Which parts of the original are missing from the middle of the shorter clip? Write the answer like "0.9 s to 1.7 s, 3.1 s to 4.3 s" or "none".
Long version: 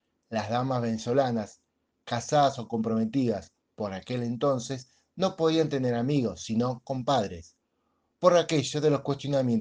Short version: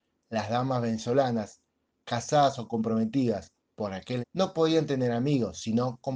4.2 s to 5.0 s